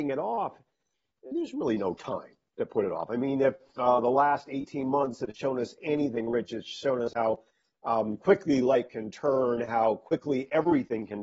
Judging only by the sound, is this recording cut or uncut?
uncut